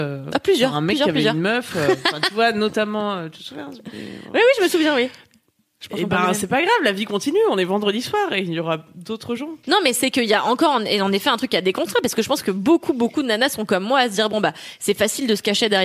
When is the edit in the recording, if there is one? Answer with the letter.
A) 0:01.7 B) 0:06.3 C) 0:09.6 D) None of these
C